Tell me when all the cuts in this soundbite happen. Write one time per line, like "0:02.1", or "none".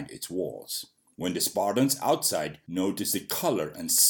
none